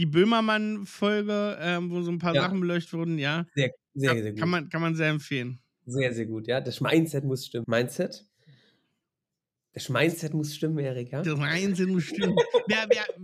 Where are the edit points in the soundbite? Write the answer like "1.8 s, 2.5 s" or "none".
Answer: 7.6 s